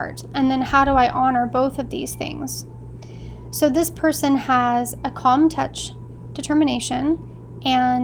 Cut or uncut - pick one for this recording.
uncut